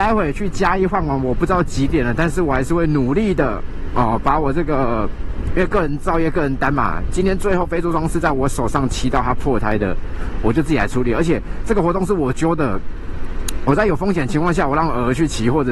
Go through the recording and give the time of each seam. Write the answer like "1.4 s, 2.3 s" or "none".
none